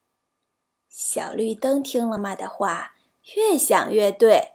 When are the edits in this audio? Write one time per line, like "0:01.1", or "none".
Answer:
0:02.2